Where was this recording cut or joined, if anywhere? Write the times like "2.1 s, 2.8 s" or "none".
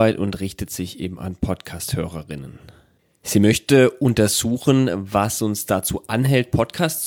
none